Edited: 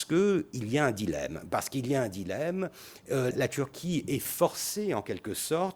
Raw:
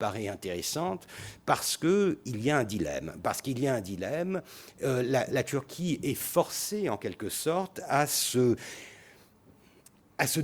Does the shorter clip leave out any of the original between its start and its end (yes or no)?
yes